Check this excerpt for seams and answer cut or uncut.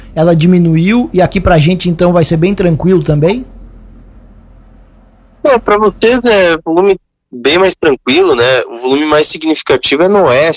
uncut